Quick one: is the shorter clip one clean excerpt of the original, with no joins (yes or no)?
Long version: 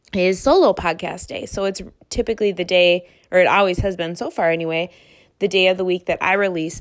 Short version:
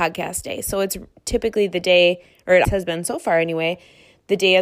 no